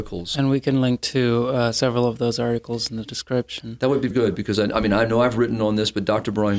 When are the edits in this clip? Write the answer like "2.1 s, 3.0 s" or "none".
4.1 s